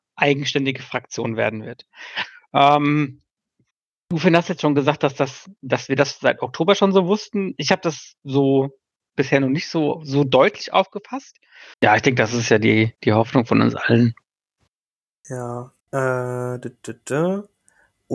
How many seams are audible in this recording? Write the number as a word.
two